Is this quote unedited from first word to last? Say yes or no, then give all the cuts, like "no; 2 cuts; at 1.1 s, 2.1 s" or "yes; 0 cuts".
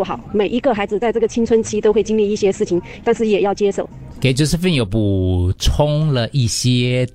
no; 1 cut; at 3.0 s